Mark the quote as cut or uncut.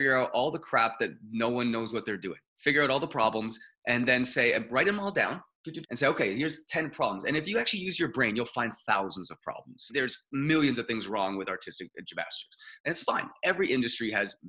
cut